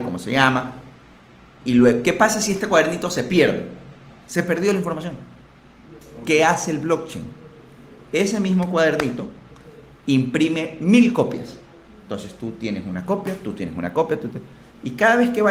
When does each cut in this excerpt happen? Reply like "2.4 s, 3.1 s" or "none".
none